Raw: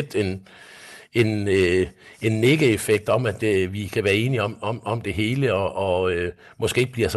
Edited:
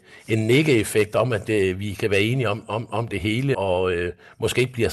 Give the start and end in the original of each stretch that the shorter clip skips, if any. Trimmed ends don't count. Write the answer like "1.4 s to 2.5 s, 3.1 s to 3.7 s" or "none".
5.5 s to 5.7 s